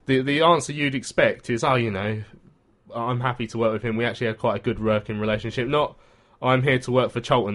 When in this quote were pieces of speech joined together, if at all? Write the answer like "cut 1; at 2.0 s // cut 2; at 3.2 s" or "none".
none

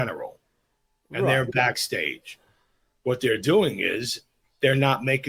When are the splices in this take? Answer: none

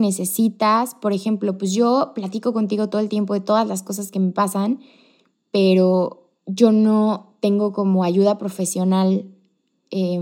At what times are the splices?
none

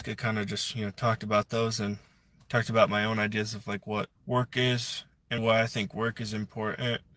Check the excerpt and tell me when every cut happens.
cut 1; at 4.2 s // cut 2; at 5.4 s

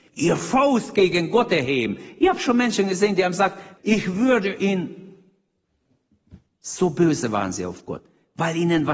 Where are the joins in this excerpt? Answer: cut 1; at 3.8 s

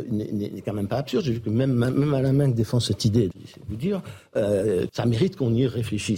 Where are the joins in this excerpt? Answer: cut 1; at 3.3 s // cut 2; at 4.9 s

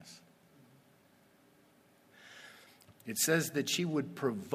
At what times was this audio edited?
cut 1; at 2.9 s

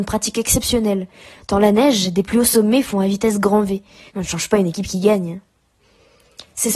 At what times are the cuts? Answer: cut 1; at 4.1 s

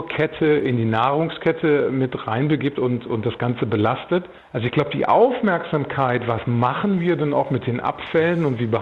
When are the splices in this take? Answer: none

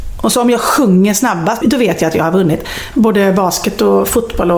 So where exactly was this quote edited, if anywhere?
cut 1; at 1.6 s // cut 2; at 2.9 s

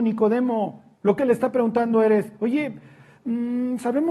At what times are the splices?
cut 1; at 1.2 s

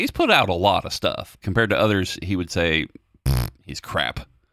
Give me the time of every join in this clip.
cut 1; at 1.4 s // cut 2; at 3.6 s

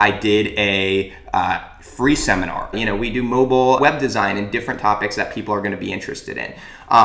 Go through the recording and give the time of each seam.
cut 1; at 2.7 s // cut 2; at 3.8 s

